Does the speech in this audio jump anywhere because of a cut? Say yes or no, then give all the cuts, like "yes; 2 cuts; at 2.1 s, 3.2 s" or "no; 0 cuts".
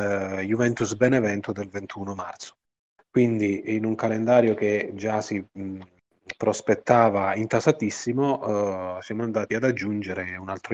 no; 0 cuts